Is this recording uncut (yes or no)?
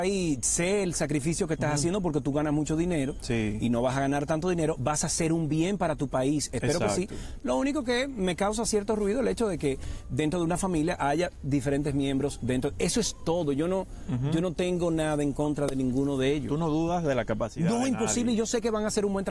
yes